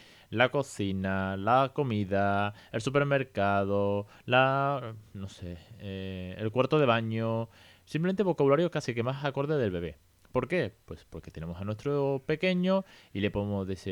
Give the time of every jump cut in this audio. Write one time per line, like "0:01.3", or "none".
none

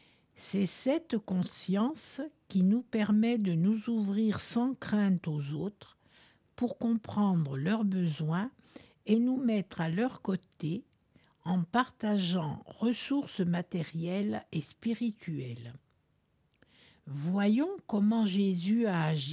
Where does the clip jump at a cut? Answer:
none

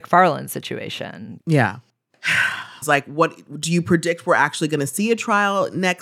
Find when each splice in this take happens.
0:01.4
0:02.8

